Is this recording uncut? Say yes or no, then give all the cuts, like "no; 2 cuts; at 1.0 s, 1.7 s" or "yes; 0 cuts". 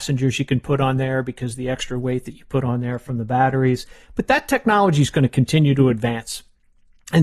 yes; 0 cuts